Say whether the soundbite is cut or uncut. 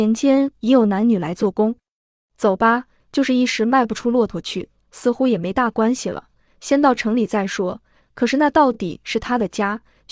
cut